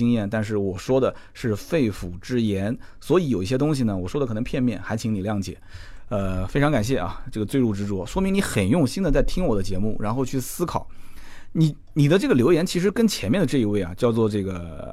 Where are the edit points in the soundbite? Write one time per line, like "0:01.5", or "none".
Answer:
none

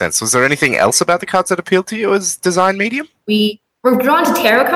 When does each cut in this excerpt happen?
0:03.2

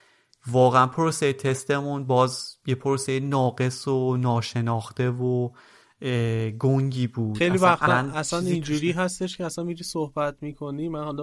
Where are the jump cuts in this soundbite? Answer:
0:07.9

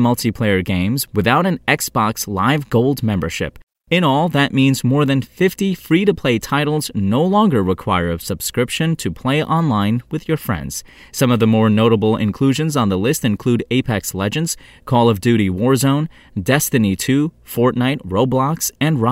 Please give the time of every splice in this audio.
none

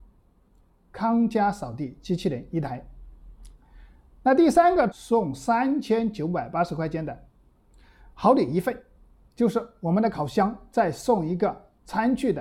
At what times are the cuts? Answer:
0:00.9
0:04.9
0:09.3

